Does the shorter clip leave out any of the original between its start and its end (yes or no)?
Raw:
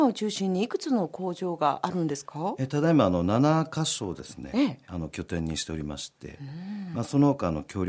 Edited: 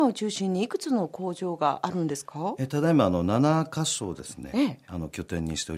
no